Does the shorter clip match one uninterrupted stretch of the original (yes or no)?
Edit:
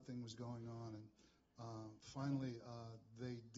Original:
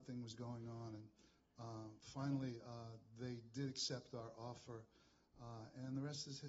yes